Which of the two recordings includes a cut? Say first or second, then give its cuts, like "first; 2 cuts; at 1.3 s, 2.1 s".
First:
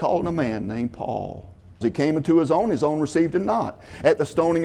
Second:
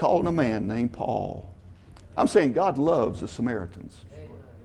first; 1 cut; at 1.8 s